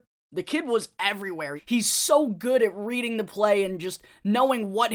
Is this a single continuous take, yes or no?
no